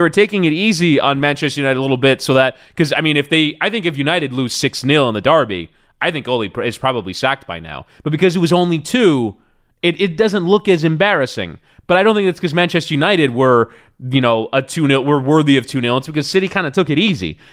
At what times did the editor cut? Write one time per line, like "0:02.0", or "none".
none